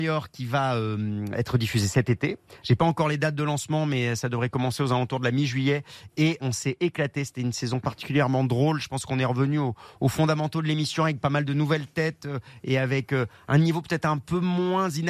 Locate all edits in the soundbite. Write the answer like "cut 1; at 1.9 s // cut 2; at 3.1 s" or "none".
cut 1; at 6.4 s